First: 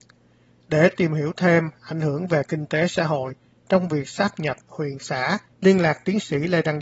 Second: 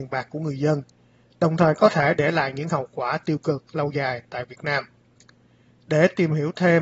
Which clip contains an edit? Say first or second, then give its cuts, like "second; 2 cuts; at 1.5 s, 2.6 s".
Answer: first; 1 cut; at 5.5 s